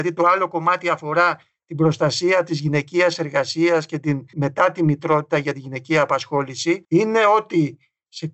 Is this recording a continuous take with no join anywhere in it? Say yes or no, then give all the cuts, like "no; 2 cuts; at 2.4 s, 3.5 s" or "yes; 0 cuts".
no; 2 cuts; at 4.3 s, 6.8 s